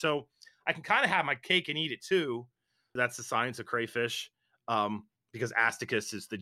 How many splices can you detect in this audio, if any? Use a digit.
1